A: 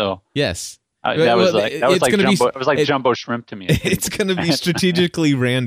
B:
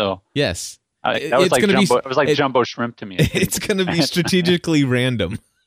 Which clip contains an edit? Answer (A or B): B